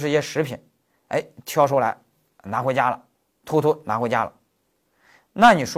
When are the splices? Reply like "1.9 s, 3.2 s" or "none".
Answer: none